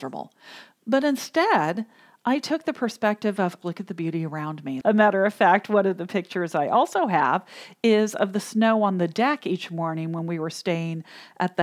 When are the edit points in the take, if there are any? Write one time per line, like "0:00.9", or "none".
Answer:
0:03.6
0:04.8